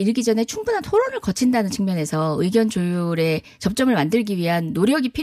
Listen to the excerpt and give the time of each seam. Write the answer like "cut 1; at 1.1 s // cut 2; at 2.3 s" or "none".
none